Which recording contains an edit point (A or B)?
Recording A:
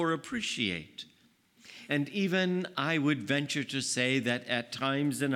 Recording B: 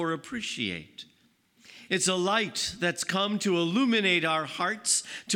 B